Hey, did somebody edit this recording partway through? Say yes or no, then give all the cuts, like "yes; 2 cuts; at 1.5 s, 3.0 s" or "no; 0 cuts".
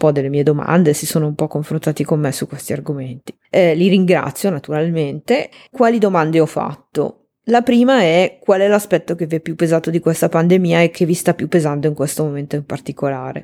no; 0 cuts